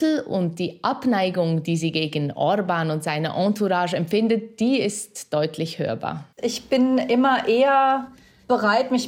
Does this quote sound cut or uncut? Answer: cut